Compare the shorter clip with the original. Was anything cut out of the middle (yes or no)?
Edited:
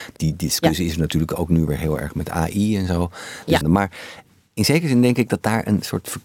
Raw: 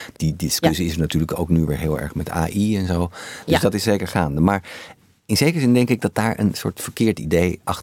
yes